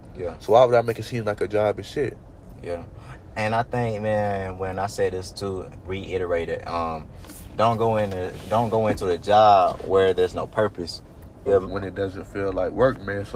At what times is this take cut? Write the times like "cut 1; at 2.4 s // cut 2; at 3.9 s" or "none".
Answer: cut 1; at 5.8 s // cut 2; at 11.5 s